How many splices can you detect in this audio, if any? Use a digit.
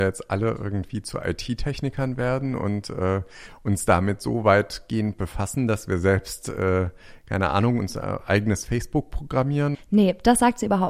1